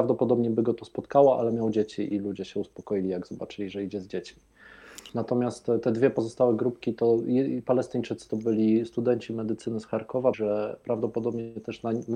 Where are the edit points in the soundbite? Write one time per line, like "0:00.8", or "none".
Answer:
0:10.3